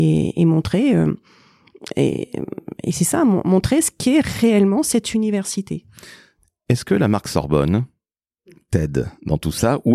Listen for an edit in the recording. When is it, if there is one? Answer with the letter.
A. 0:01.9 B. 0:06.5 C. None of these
C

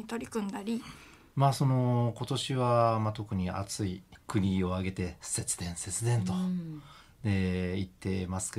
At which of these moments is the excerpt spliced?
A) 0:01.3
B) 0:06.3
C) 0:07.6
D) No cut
A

